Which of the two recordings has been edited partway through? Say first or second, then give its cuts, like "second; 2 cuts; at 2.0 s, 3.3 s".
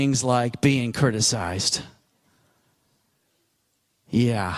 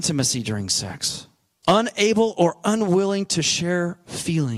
second; 1 cut; at 1.6 s